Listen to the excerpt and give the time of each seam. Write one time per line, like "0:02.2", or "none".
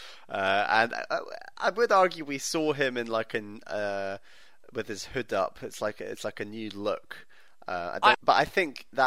0:08.1